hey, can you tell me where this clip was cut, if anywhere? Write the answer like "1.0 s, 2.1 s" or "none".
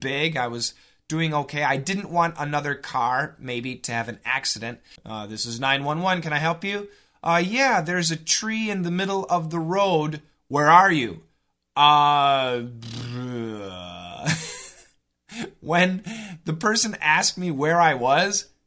5.0 s